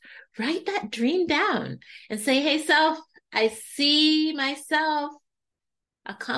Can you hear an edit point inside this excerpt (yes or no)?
no